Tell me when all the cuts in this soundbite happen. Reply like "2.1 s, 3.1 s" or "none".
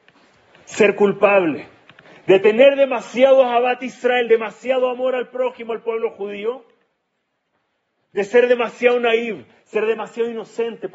none